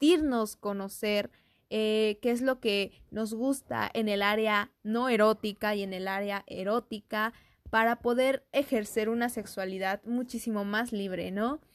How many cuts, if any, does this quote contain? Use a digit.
0